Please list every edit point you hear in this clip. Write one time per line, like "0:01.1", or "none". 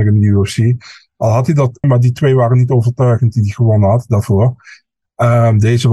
0:01.8